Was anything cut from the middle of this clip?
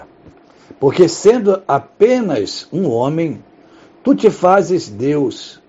no; 0 cuts

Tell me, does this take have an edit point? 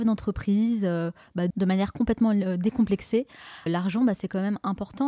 yes; 2 cuts; at 1.5 s, 3.7 s

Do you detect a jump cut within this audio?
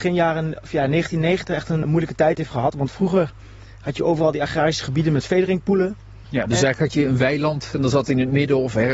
yes; 2 cuts; at 1.8 s, 6.2 s

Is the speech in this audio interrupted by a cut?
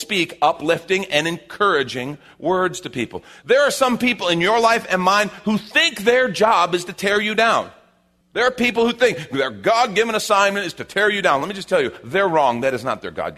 yes; 1 cut; at 3.4 s

